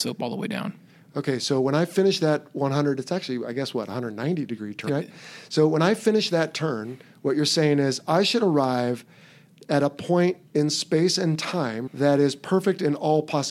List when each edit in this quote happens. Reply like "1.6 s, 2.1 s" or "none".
4.9 s, 10.5 s, 11.9 s

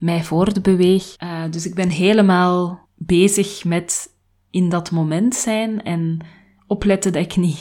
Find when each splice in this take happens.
1.1 s, 2.8 s

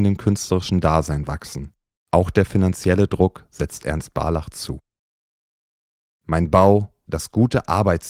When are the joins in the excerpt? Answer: 7.1 s

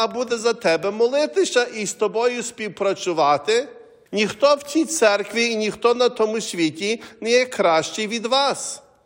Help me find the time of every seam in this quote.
4.1 s

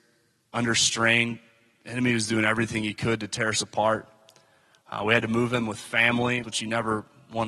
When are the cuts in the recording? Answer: 6.4 s

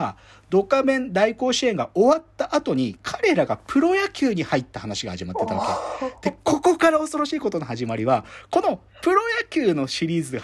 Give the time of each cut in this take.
none

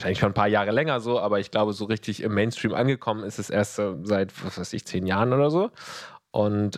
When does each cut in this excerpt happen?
none

